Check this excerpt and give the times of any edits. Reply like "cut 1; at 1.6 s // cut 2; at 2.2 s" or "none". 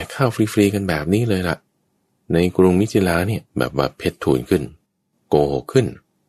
cut 1; at 3.5 s